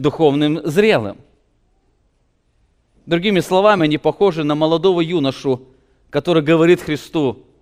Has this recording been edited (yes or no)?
no